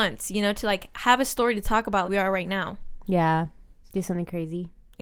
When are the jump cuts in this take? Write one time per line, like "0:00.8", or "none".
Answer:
0:02.0